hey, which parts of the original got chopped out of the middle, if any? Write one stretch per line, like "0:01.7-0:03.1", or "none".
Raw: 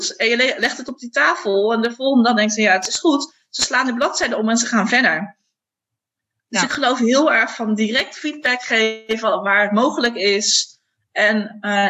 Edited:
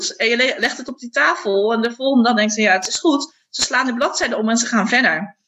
none